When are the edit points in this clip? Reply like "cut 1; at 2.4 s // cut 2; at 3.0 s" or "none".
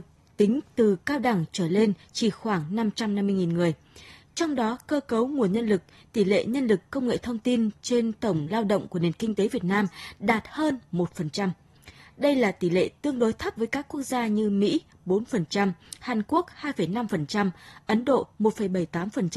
cut 1; at 13.6 s